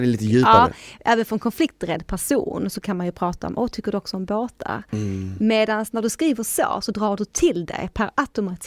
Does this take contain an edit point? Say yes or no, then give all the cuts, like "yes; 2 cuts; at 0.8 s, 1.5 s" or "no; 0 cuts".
no; 0 cuts